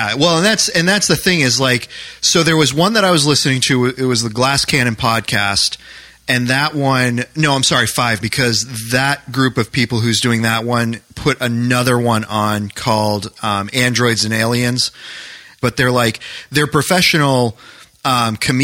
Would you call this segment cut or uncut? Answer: cut